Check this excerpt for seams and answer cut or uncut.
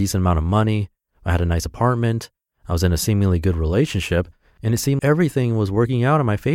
cut